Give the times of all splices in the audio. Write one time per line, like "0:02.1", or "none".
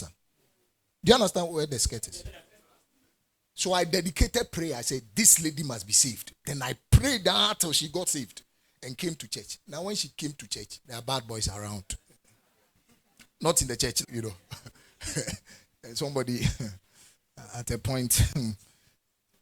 0:10.8
0:14.0